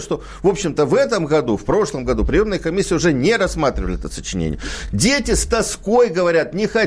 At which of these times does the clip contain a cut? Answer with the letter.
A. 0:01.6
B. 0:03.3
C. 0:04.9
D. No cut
D